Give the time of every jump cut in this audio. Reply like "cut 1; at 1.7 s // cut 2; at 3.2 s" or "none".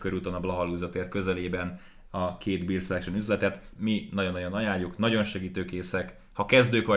cut 1; at 3.8 s // cut 2; at 5.0 s